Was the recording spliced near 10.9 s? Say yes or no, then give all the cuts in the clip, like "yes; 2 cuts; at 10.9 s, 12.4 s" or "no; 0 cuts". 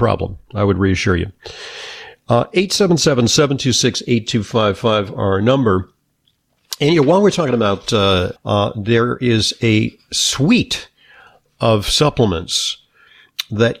no; 1 cut; at 8.4 s